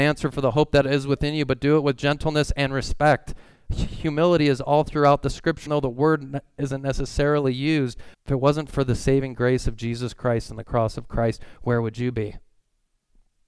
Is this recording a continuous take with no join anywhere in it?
no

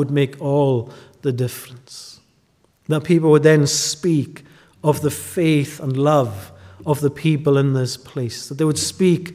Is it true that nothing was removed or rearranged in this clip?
yes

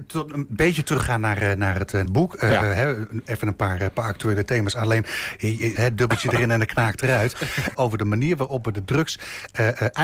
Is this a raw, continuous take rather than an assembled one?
no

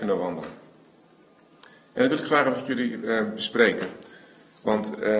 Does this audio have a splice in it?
no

